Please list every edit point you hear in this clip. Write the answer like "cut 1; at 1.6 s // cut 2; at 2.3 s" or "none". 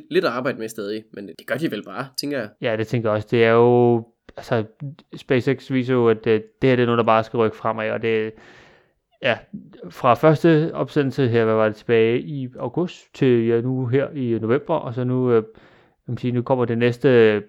cut 1; at 2.5 s // cut 2; at 16.4 s